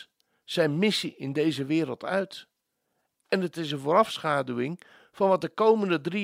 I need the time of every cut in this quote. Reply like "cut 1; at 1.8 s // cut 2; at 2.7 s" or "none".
none